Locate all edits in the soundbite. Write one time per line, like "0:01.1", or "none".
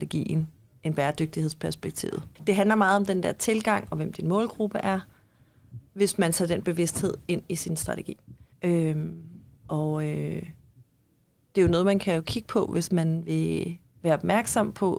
0:08.5